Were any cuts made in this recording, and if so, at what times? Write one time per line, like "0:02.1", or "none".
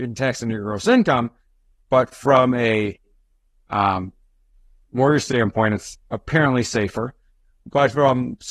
none